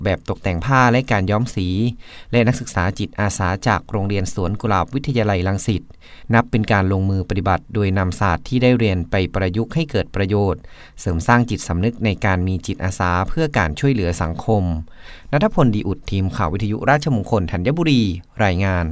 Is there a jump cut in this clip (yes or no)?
no